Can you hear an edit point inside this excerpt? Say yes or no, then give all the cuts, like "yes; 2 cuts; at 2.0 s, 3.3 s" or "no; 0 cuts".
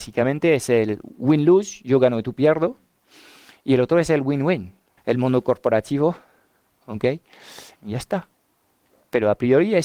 yes; 2 cuts; at 5.0 s, 7.8 s